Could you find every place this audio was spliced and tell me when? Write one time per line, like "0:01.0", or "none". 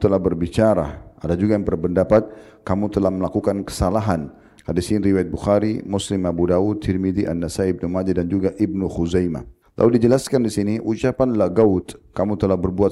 0:04.6